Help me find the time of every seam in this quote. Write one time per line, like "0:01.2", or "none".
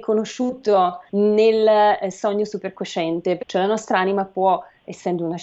0:01.1
0:03.4